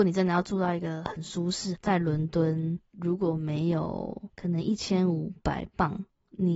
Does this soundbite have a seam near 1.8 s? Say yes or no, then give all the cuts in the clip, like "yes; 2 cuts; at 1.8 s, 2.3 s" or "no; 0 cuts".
yes; 1 cut; at 1.8 s